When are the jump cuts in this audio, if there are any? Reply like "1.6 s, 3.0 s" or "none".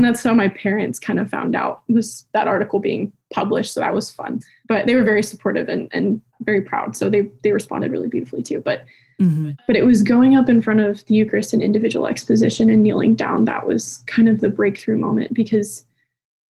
none